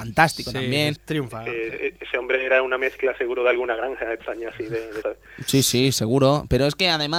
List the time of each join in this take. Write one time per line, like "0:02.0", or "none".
0:01.0
0:05.0